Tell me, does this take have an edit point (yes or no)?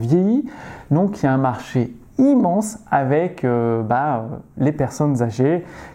no